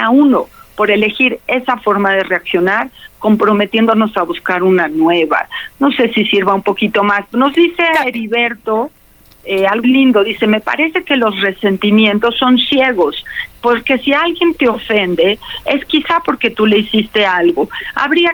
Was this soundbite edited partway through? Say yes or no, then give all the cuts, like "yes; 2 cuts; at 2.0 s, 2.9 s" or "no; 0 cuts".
yes; 2 cuts; at 9.8 s, 13.6 s